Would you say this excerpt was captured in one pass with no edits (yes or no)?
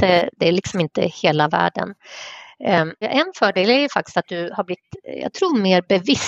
no